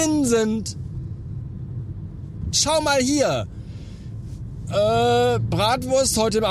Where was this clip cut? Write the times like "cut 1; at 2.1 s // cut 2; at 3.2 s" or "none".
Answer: cut 1; at 2.5 s // cut 2; at 4.7 s